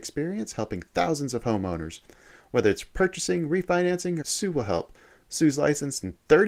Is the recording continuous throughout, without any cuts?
no; 1 cut; at 4.2 s

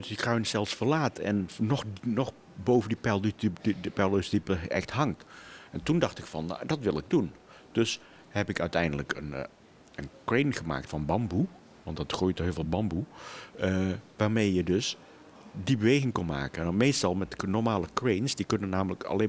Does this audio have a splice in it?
no; 0 cuts

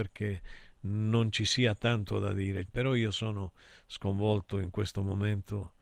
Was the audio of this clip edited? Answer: yes; 1 cut; at 2.7 s

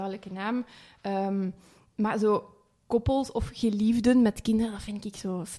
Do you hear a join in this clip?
no; 0 cuts

